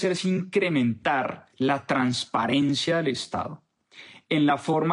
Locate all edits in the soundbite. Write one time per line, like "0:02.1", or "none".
0:01.5